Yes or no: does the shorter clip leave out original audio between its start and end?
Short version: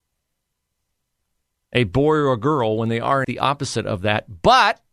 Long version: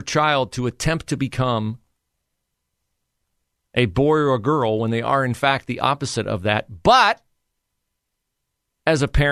yes